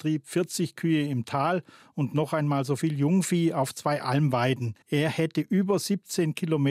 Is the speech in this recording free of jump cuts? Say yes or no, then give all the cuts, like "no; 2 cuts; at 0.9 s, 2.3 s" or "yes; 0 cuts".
no; 1 cut; at 4.8 s